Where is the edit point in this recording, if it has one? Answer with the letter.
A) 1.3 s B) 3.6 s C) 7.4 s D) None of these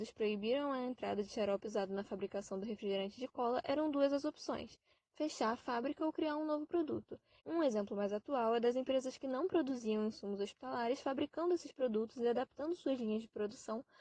C